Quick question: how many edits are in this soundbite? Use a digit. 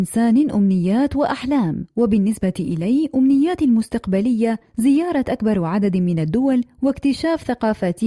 0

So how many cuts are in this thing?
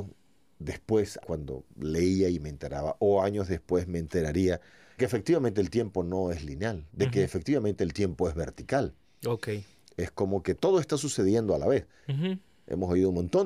2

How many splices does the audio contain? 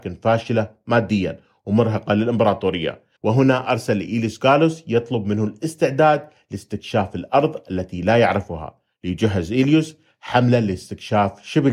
1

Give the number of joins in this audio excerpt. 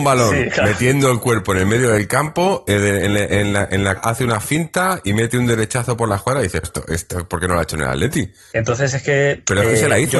3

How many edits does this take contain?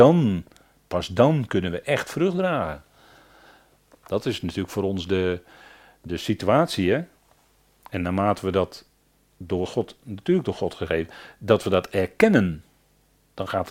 0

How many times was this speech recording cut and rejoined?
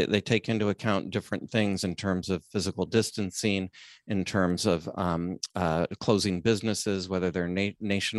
0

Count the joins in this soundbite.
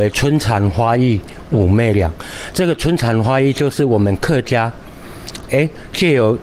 1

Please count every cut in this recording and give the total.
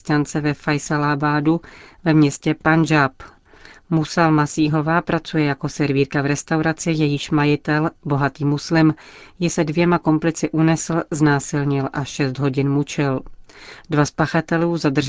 0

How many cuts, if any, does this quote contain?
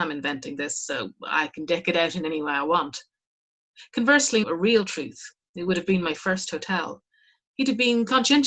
2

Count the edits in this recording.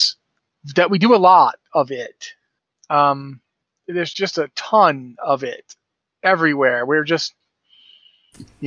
1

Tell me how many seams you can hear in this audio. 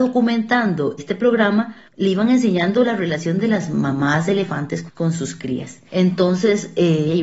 1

